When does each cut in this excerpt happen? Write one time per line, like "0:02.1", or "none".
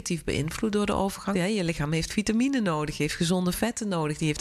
0:01.3